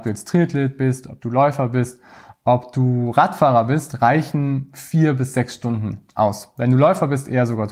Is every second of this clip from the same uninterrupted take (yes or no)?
yes